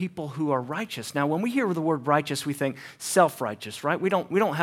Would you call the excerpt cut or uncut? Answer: uncut